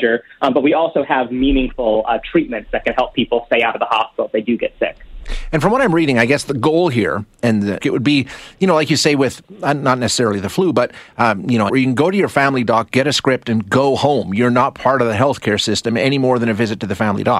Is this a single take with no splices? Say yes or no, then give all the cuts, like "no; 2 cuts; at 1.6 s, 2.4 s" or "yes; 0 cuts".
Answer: no; 2 cuts; at 7.8 s, 11.7 s